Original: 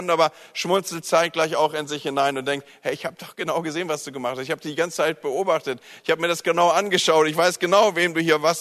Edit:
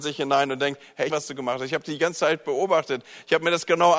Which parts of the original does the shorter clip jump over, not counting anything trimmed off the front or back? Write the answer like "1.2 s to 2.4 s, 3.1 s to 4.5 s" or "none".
3.0 s to 3.9 s